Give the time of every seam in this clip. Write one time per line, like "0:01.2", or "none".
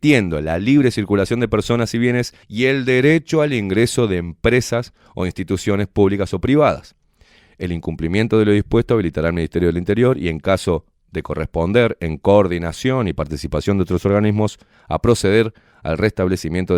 0:02.4